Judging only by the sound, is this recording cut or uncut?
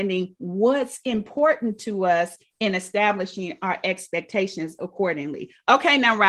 uncut